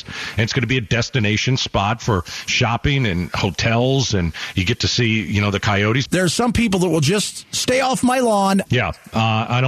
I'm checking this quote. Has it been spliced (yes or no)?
yes